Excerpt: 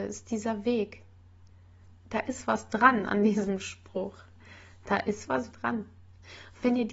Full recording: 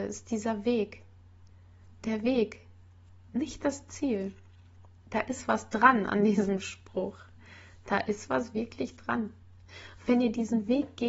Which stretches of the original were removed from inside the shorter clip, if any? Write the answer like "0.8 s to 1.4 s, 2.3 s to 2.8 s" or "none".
2.0 s to 5.0 s, 8.5 s to 9.0 s